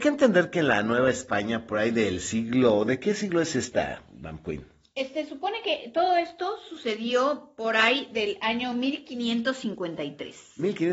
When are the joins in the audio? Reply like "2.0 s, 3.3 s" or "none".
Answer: none